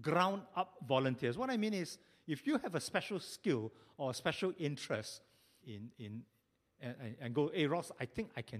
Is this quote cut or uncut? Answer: cut